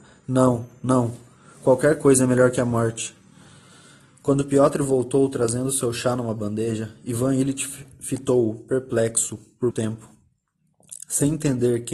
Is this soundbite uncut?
no; 1 cut; at 9.7 s

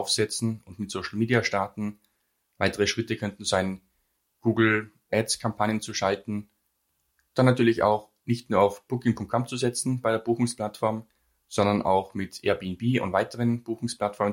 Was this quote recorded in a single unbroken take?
yes; 0 cuts

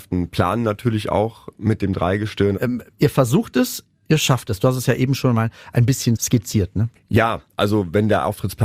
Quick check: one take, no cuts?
no; 1 cut; at 2.5 s

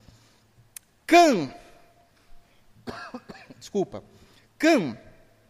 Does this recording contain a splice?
no; 0 cuts

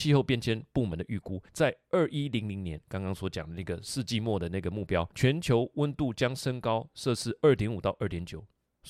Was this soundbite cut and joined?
yes; 2 cuts; at 1.5 s, 5.1 s

